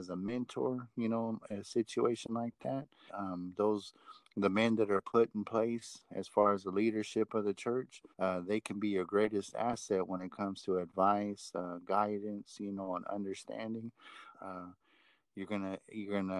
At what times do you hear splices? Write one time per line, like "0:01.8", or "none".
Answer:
0:03.1
0:08.1
0:14.3